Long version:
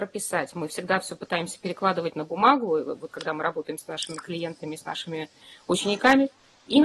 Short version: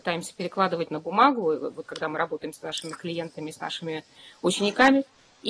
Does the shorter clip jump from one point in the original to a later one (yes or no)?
no